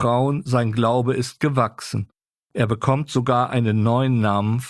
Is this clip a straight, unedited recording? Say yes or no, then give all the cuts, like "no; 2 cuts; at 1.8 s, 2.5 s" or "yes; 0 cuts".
yes; 0 cuts